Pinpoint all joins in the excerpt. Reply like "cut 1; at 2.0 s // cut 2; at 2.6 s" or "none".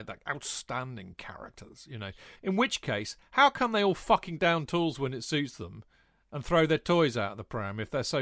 cut 1; at 2.3 s